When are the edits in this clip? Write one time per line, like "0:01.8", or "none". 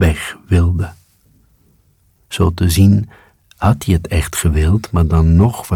none